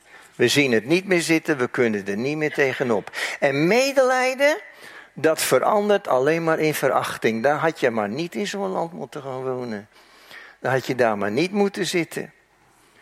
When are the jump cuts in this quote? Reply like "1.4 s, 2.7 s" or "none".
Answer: none

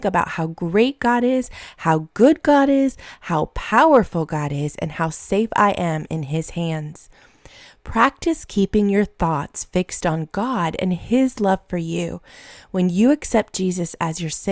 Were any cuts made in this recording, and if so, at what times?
none

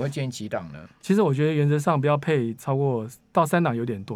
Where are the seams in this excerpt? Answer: none

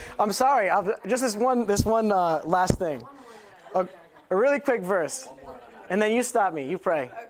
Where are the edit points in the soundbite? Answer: none

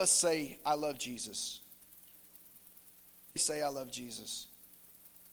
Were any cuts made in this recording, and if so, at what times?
3.4 s

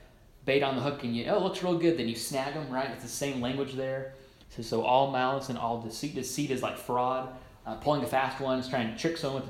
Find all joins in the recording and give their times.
4.4 s

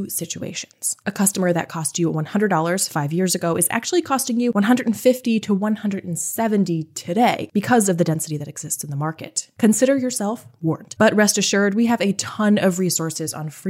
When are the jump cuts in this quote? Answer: 1.0 s

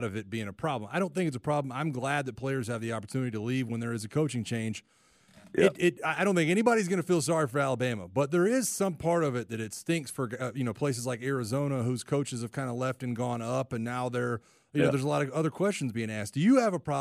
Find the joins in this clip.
none

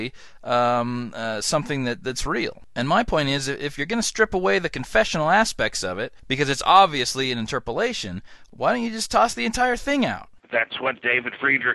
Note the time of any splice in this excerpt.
none

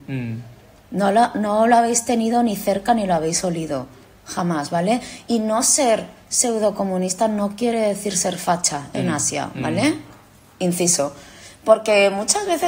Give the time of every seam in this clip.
none

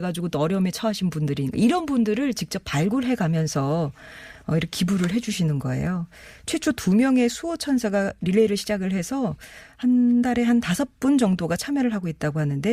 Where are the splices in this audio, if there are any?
none

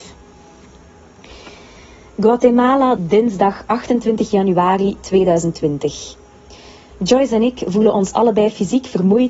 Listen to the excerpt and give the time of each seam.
3.0 s, 6.9 s

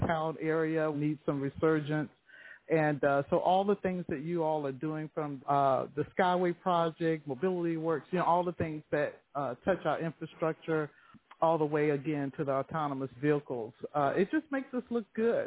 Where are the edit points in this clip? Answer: 0.9 s, 5.4 s

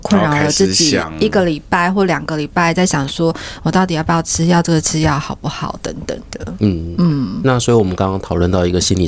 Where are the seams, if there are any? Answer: none

